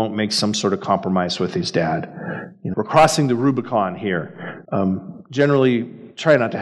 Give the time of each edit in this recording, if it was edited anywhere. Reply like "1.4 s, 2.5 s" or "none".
2.7 s, 4.6 s

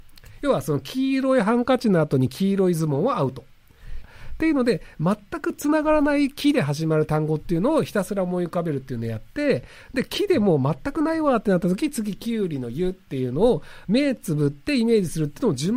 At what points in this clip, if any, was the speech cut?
4.0 s

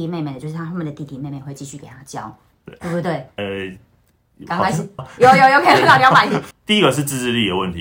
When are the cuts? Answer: 3.4 s, 5.0 s, 6.5 s

